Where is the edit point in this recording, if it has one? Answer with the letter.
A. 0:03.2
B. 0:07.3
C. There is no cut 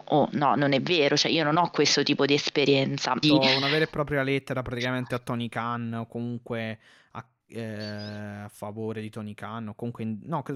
A